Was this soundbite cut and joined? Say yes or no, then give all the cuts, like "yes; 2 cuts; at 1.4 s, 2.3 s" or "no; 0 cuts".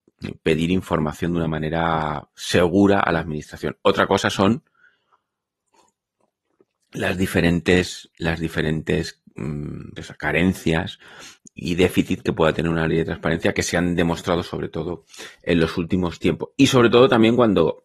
yes; 1 cut; at 10.0 s